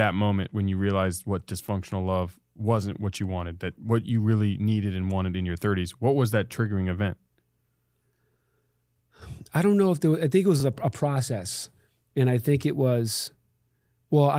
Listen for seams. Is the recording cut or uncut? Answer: uncut